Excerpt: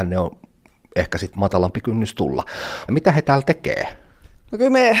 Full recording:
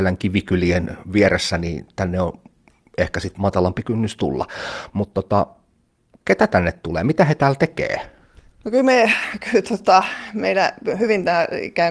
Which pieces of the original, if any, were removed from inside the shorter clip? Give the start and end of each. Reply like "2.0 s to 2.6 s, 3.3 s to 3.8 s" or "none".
4.9 s to 7.0 s